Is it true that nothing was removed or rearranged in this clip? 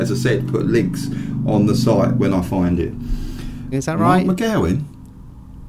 no; 1 cut; at 3.7 s

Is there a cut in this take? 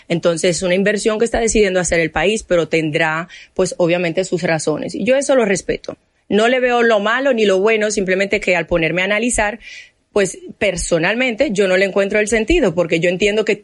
no; 0 cuts

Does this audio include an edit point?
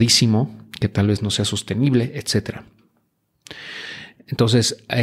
no; 0 cuts

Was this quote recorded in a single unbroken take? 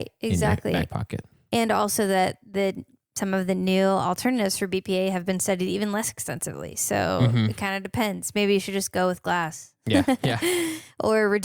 yes; 0 cuts

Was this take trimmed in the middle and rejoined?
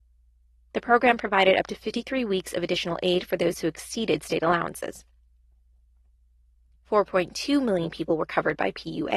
no; 0 cuts

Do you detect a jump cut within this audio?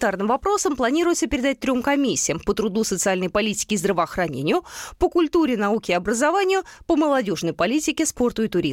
no; 0 cuts

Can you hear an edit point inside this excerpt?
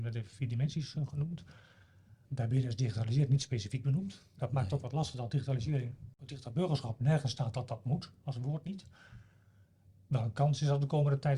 yes; 1 cut; at 2.2 s

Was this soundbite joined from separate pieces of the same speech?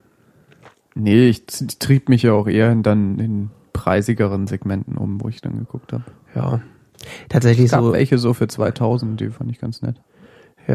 no; 0 cuts

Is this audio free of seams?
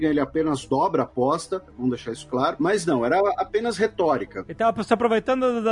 yes; 0 cuts

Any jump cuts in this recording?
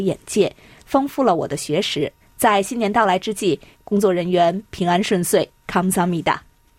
yes; 3 cuts; at 2.2 s, 3.7 s, 5.6 s

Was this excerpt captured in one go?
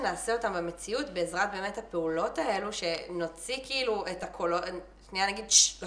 yes; 0 cuts

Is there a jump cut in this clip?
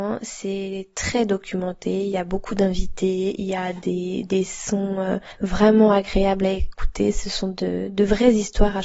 no; 0 cuts

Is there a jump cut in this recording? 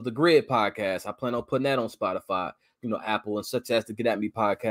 no; 0 cuts

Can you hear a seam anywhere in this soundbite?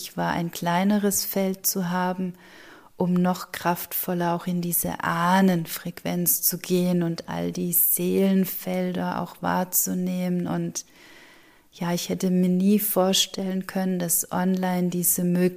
no; 0 cuts

